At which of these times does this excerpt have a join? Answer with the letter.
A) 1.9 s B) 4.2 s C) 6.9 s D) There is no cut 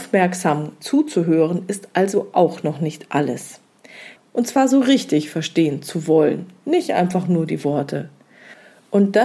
B